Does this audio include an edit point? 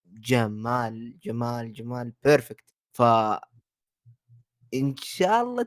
yes; 1 cut; at 2.8 s

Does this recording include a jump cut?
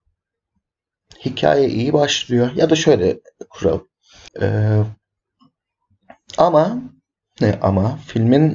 yes; 1 cut; at 4.3 s

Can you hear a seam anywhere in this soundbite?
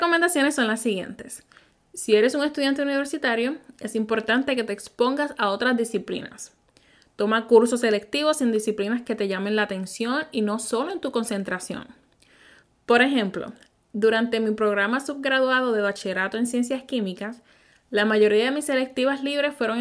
no; 0 cuts

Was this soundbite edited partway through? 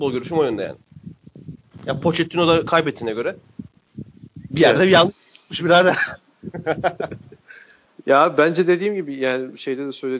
no; 0 cuts

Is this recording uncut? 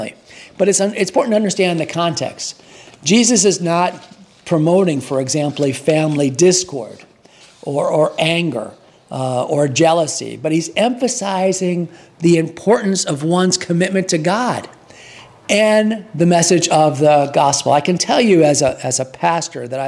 yes; 0 cuts

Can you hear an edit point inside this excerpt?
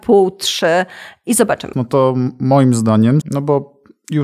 yes; 2 cuts; at 1.7 s, 3.2 s

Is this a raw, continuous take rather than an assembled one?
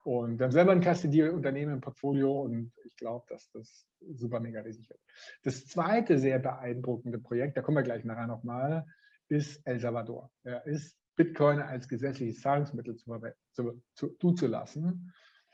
no; 1 cut; at 11.0 s

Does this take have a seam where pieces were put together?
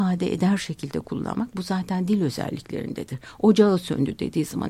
no; 0 cuts

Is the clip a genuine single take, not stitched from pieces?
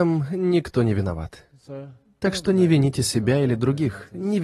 yes; 0 cuts

